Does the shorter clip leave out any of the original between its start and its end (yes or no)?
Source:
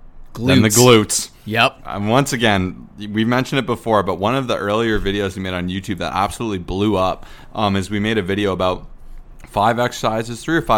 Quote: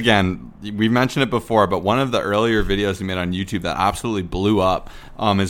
no